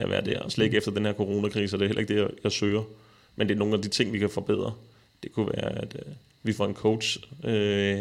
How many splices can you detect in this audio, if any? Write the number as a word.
zero